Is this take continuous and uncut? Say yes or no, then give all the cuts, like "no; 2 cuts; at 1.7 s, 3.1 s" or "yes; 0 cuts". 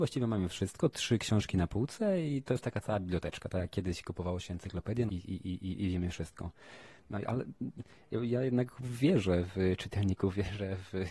no; 1 cut; at 5.1 s